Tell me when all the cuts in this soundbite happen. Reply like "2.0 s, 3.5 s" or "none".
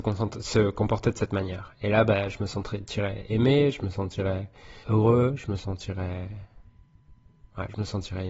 4.8 s